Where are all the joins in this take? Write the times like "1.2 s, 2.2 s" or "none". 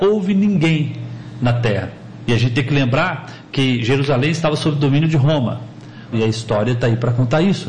2.3 s, 6.1 s